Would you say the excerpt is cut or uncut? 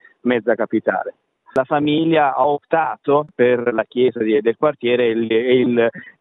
cut